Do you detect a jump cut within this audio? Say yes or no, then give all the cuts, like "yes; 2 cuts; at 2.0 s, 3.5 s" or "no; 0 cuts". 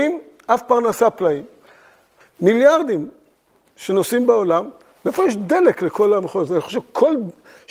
yes; 1 cut; at 2.2 s